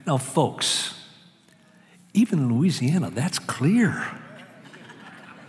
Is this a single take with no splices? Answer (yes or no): yes